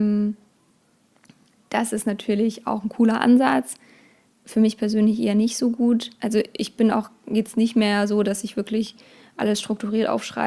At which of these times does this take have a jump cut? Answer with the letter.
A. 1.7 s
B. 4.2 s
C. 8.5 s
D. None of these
D